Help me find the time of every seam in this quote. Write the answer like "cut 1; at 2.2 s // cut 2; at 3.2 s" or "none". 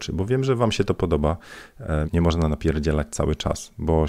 cut 1; at 2.0 s